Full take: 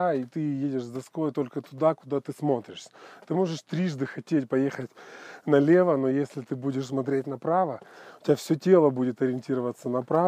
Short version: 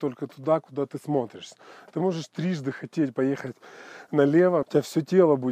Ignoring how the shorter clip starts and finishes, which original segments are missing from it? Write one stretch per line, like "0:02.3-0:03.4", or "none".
0:06.0-0:08.2